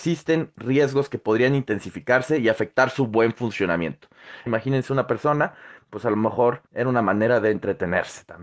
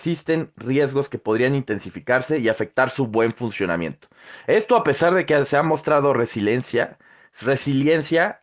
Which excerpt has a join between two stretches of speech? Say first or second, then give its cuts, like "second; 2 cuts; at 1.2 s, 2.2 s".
first; 2 cuts; at 4.5 s, 6.7 s